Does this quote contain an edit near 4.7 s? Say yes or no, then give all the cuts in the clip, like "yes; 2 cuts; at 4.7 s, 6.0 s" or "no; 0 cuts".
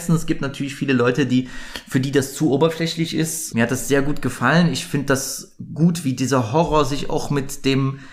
no; 1 cut; at 3.5 s